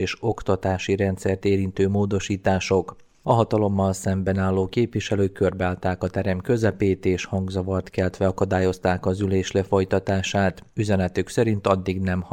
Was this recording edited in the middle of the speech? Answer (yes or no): no